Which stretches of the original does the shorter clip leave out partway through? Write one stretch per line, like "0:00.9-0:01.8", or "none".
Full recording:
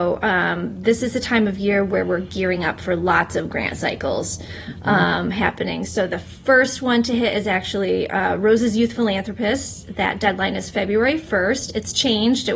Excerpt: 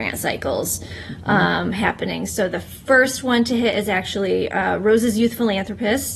none